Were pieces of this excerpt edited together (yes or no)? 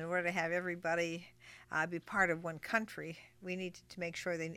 no